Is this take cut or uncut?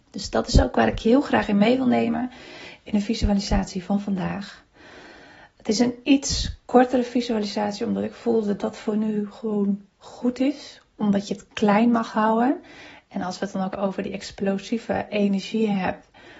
cut